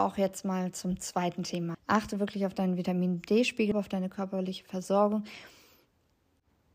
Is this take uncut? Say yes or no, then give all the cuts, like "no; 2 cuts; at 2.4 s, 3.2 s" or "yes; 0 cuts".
no; 2 cuts; at 1.7 s, 3.7 s